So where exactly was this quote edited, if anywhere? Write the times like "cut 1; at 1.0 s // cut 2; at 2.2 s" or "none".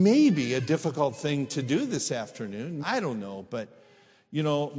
cut 1; at 2.8 s

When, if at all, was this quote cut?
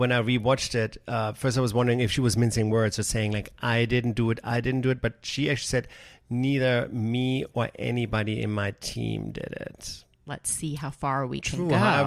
cut 1; at 10.3 s

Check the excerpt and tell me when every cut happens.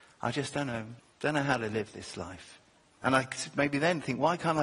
cut 1; at 1.0 s // cut 2; at 3.0 s

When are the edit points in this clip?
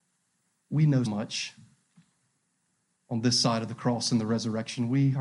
cut 1; at 1.1 s

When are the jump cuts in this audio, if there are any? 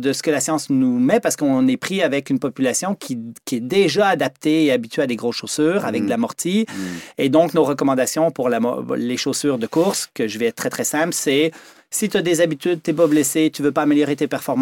none

